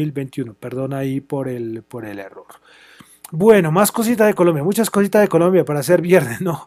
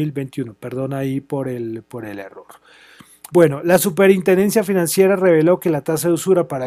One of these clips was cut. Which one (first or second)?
second